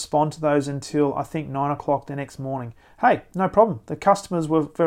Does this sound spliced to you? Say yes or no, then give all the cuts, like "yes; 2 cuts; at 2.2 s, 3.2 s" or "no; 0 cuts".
no; 0 cuts